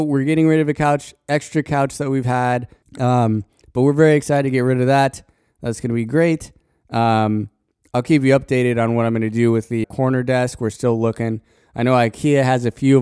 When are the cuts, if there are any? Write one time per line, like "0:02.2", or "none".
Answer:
0:02.8
0:09.8

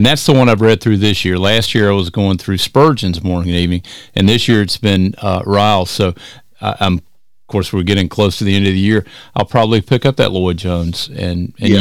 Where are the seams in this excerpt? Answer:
none

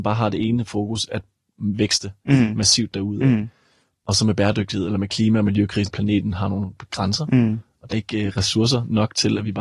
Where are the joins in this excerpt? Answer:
0:05.9
0:07.9

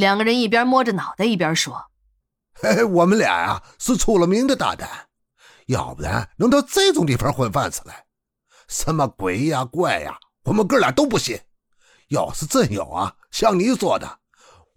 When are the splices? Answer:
none

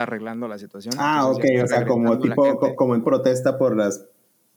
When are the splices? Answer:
0:03.0

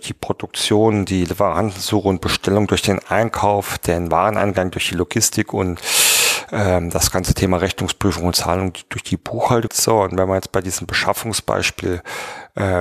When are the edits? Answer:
0:09.7

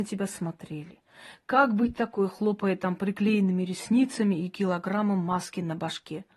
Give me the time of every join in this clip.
none

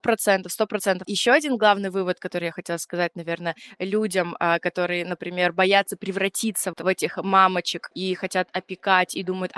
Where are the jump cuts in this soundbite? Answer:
0:01.0
0:06.7

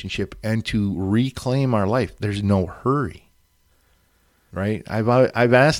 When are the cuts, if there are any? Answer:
0:04.5

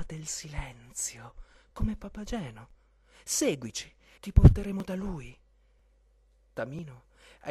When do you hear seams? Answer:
0:04.2

